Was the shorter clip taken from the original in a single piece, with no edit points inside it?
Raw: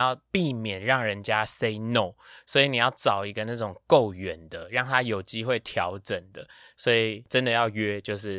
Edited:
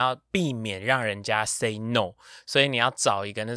yes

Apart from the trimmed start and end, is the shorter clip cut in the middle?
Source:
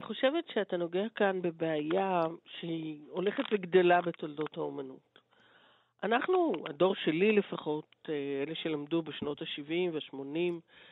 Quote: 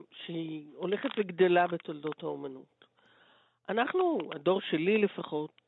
no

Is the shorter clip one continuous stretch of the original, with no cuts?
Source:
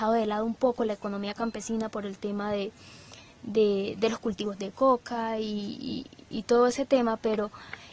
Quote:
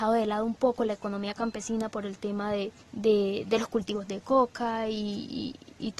no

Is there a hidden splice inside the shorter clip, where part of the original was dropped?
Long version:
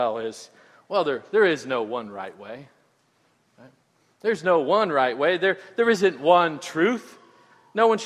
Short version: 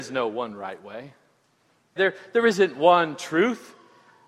yes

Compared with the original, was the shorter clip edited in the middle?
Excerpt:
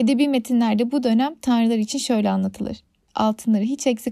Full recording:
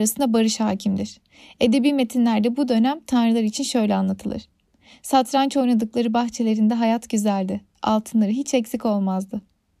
yes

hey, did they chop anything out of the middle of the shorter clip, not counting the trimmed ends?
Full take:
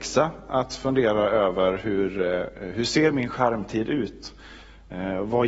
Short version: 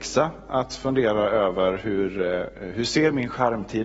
no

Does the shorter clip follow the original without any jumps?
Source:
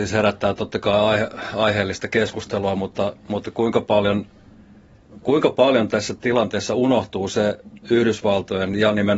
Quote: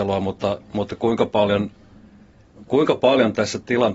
yes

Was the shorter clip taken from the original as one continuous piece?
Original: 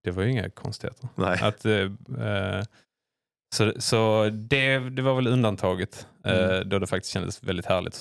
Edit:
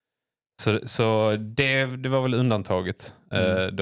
yes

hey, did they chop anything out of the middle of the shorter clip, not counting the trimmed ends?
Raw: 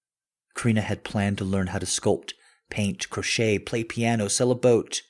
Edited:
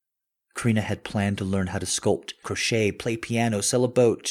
yes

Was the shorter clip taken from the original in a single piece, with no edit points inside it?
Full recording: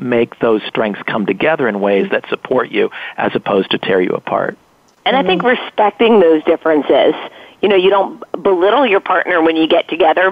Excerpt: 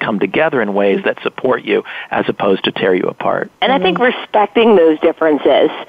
no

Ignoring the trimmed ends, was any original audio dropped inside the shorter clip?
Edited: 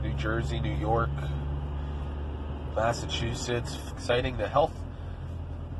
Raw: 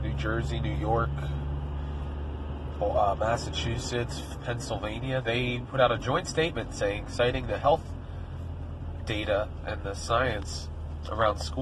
yes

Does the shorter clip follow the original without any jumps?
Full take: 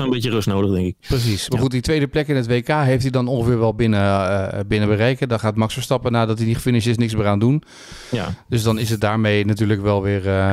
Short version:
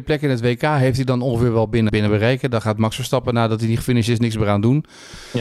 no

